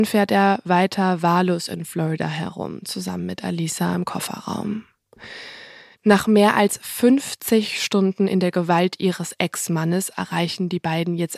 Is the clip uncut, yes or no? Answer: no